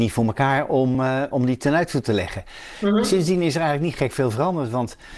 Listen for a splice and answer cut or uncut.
uncut